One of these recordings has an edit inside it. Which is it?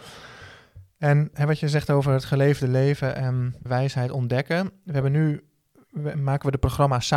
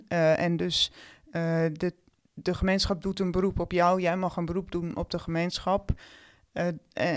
first; 2 cuts; at 3.7 s, 6.1 s

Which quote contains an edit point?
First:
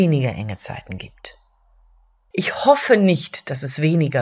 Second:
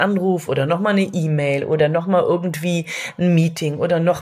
first; 1 cut; at 2.3 s

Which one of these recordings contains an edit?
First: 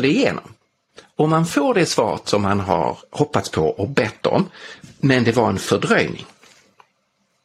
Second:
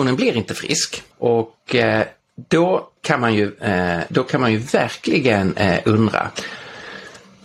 second; 2 cuts; at 1.1 s, 3.0 s

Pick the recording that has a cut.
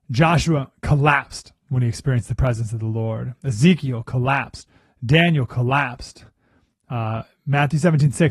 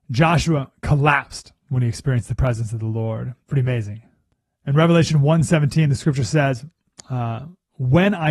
second; 1 cut; at 3.4 s

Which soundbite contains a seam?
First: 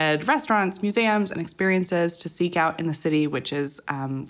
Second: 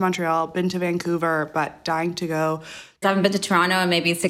second; 1 cut; at 3.0 s

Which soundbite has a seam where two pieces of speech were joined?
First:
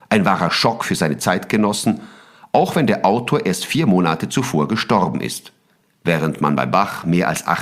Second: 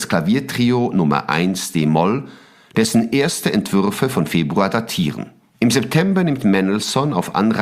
second; 1 cut; at 5.5 s

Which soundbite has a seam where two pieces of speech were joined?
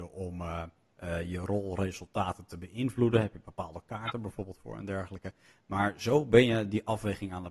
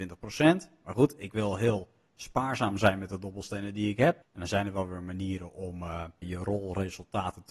second; 2 cuts; at 4.2 s, 6.2 s

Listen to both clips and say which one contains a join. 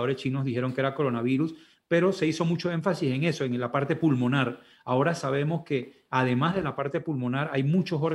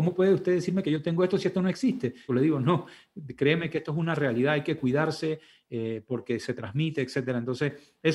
second; 1 cut; at 2.3 s

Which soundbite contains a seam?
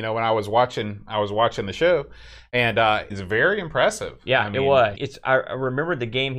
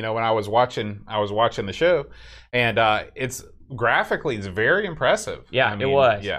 first; 2 cuts; at 3.1 s, 4.9 s

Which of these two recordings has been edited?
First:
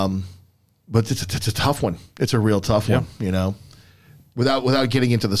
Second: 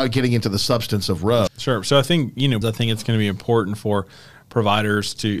second; 2 cuts; at 1.5 s, 2.6 s

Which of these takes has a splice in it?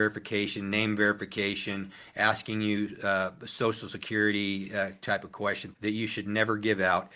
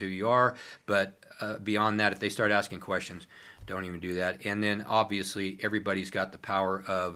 first; 1 cut; at 5.7 s

